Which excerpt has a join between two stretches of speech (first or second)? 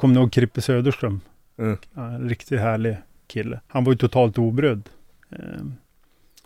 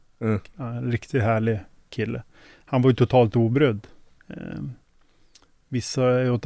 first